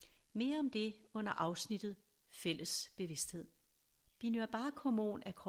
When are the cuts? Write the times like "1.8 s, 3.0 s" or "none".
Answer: 4.1 s